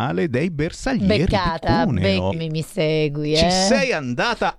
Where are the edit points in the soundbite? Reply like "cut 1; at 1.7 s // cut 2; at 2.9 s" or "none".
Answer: cut 1; at 2.3 s